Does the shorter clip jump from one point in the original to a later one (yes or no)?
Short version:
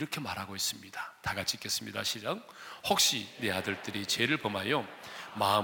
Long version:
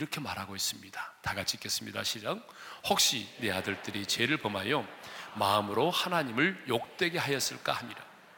no